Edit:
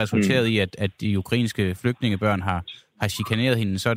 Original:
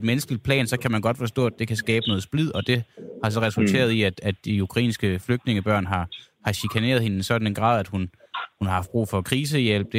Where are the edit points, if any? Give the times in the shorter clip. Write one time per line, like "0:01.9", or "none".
none